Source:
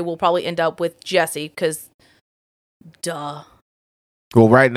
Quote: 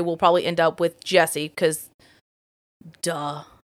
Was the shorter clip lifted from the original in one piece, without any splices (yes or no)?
yes